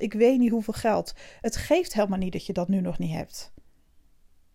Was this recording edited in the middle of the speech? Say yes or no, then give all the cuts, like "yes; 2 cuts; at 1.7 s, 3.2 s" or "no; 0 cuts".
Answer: no; 0 cuts